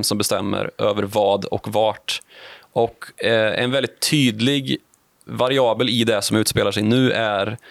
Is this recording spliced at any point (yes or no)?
yes